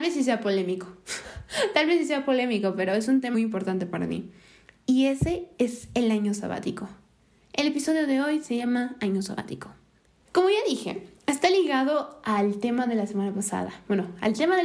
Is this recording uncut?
no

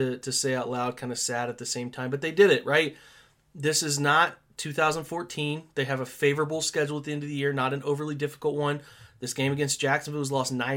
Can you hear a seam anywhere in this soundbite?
no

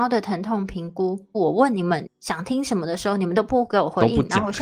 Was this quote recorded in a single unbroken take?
no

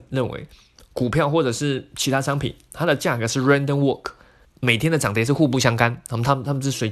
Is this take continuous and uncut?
no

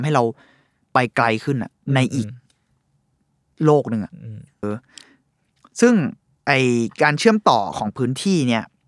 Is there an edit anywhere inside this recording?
yes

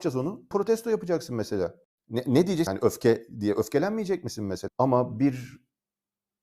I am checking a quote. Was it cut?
yes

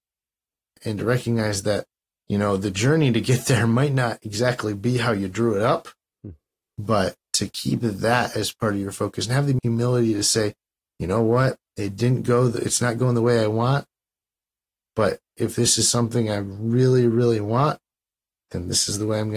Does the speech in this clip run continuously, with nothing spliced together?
yes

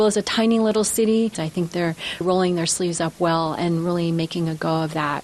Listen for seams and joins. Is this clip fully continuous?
no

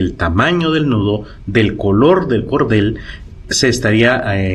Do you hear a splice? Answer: no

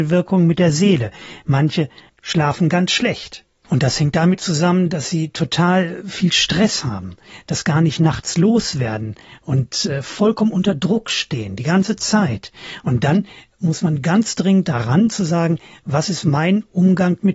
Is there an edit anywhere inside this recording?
no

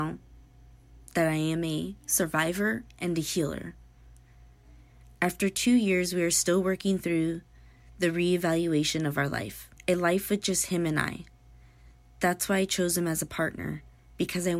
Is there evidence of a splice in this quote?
yes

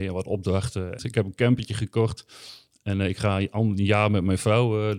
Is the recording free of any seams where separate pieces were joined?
no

